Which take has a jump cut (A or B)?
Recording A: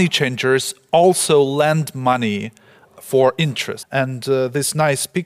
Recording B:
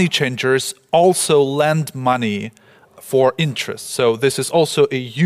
A